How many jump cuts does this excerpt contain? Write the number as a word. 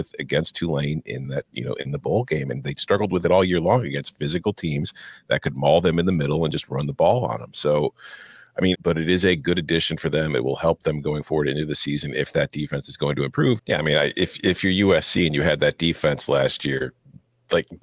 two